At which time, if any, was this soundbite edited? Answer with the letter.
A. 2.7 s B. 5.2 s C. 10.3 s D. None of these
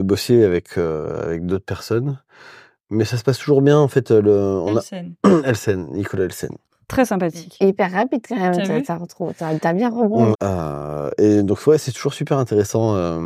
C